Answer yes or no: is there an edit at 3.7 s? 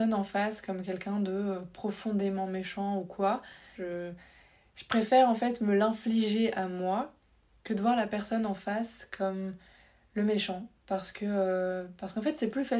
yes